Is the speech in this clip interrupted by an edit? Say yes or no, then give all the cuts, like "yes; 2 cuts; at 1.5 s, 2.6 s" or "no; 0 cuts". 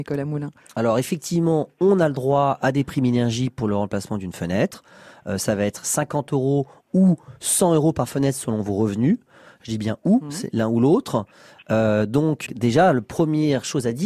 yes; 1 cut; at 12.5 s